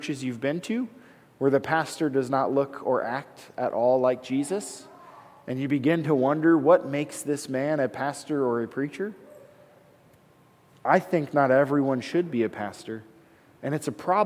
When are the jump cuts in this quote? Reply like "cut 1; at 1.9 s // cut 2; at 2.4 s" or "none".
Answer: none